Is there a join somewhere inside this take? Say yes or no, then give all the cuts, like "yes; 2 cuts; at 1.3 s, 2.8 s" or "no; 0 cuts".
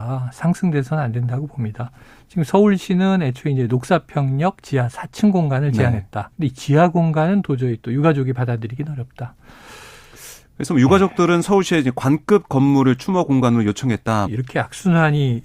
yes; 2 cuts; at 6.3 s, 14.3 s